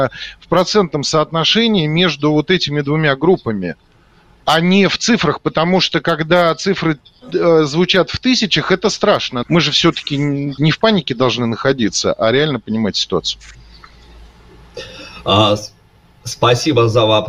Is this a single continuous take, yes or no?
no